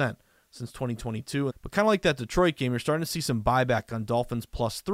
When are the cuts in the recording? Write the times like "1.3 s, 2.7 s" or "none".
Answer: 1.5 s